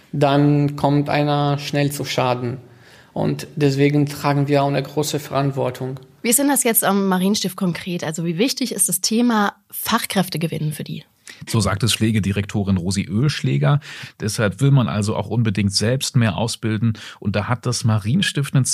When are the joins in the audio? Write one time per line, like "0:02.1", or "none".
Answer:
0:11.5

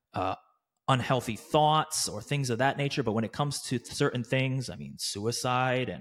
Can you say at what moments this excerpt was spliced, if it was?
none

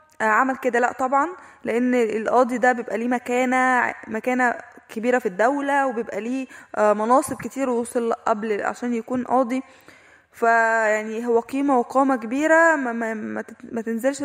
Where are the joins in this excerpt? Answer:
none

